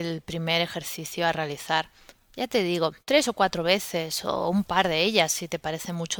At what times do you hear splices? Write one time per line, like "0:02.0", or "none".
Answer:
0:03.0